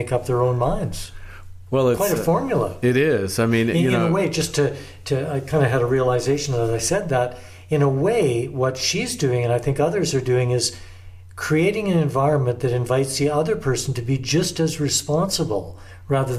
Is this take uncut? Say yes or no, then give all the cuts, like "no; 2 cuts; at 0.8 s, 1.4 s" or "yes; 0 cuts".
yes; 0 cuts